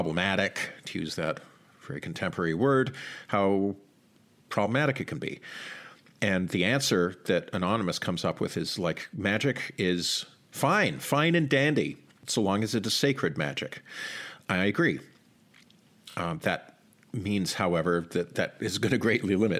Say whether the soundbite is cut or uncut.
uncut